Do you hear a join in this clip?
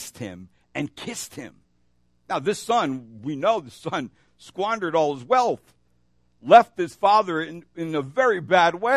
no; 0 cuts

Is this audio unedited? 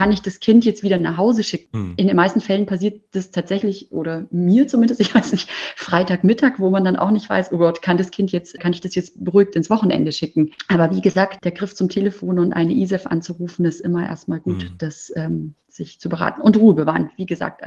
yes; 0 cuts

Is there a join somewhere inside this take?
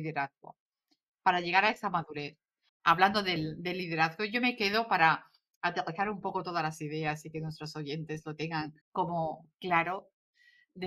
yes; 2 cuts; at 2.7 s, 8.8 s

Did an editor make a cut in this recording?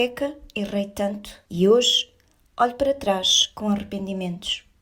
yes; 1 cut; at 1.5 s

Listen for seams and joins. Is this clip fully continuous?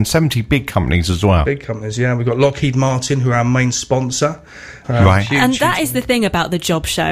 no; 1 cut; at 4.8 s

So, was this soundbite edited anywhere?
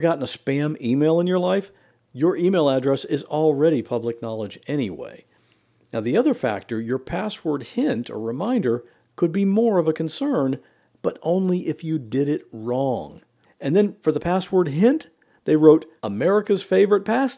yes; 2 cuts; at 13.4 s, 16.0 s

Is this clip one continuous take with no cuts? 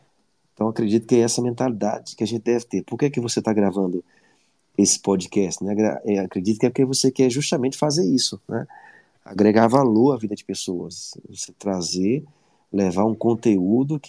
yes; 0 cuts

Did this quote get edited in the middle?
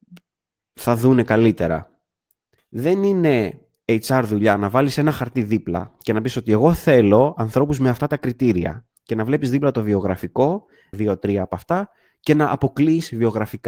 yes; 2 cuts; at 2.6 s, 10.9 s

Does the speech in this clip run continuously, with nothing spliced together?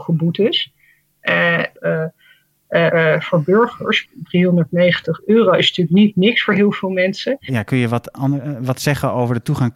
no; 3 cuts; at 1.8 s, 2.9 s, 7.5 s

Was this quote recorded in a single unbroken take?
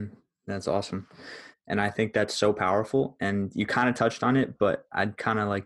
no; 1 cut; at 1.5 s

